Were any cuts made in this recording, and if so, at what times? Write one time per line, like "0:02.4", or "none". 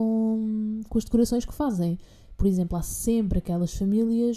none